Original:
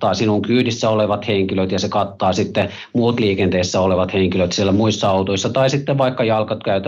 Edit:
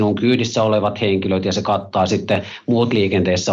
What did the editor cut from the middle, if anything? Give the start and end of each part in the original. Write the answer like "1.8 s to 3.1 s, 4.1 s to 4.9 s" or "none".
none